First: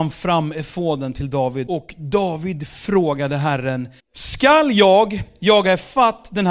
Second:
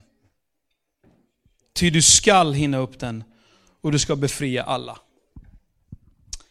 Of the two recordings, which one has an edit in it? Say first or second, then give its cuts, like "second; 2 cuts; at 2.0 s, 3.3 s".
first; 2 cuts; at 1.7 s, 4.0 s